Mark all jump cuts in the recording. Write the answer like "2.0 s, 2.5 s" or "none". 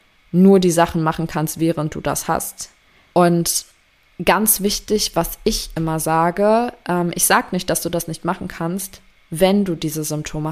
3.1 s